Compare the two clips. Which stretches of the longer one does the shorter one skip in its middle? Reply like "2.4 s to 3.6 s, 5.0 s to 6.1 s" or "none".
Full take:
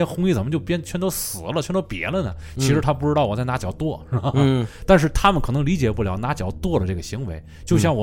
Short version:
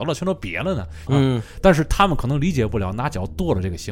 2.5 s to 4.3 s